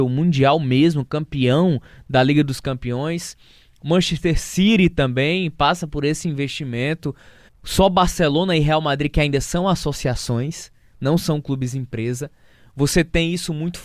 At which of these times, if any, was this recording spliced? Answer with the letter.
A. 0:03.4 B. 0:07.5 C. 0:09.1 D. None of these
B